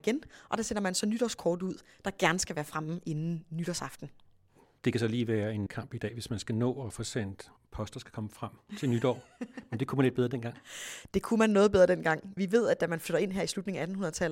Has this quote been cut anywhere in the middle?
no; 0 cuts

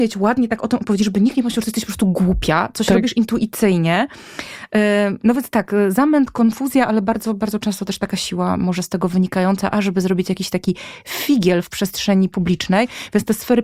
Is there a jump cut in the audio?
no; 0 cuts

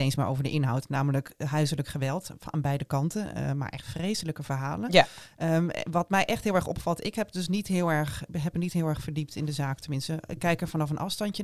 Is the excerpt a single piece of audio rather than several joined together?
yes; 0 cuts

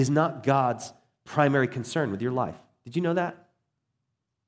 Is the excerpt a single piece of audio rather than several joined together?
yes; 0 cuts

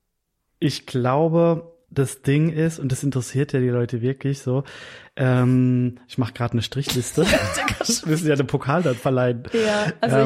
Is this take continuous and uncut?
no; 1 cut; at 1.8 s

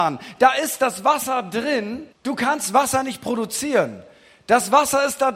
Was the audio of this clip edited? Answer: yes; 1 cut; at 2.1 s

